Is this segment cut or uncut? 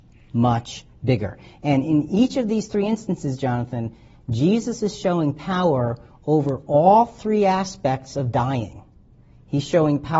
uncut